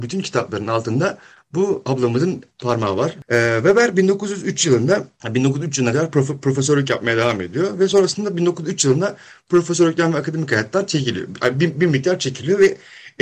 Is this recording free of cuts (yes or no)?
yes